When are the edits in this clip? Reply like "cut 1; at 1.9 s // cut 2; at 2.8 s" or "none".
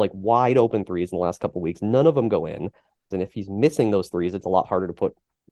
cut 1; at 3.1 s